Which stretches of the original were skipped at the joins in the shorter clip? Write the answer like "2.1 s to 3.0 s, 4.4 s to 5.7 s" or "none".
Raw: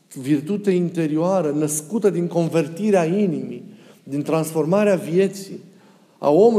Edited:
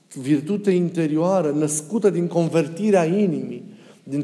none